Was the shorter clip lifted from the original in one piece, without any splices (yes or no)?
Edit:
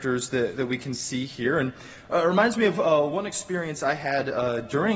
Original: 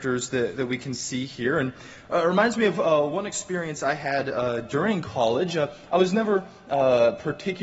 yes